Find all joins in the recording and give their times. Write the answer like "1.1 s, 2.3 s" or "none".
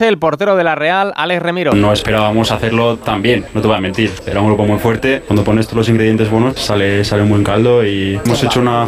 5.3 s, 6.6 s